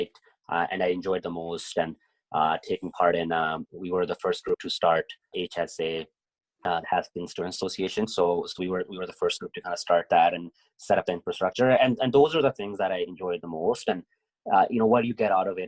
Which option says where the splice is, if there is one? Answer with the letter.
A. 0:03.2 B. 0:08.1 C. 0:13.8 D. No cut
D